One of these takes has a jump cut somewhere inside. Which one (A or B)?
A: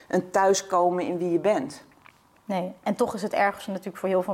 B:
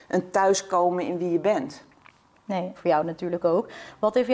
B